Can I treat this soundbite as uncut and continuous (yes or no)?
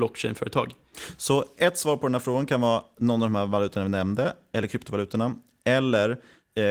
yes